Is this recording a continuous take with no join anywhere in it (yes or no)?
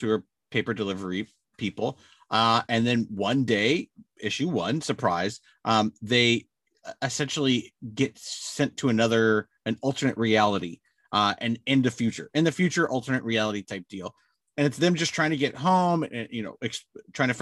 yes